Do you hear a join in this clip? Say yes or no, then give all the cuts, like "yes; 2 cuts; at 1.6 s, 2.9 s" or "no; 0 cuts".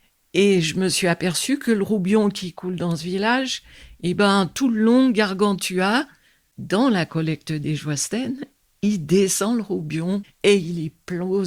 no; 0 cuts